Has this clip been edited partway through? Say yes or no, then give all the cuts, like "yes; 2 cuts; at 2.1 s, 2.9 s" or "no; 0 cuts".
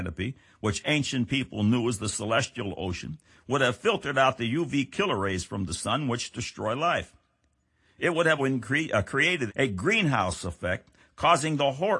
yes; 2 cuts; at 8.4 s, 9.5 s